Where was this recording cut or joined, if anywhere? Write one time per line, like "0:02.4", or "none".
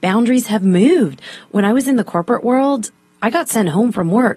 none